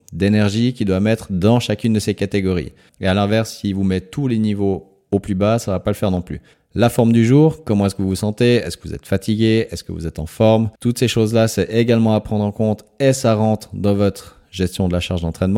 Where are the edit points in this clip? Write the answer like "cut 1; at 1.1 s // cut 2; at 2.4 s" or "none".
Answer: cut 1; at 2.9 s // cut 2; at 6.5 s // cut 3; at 10.7 s